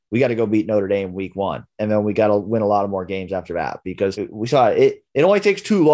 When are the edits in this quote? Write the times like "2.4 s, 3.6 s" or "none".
none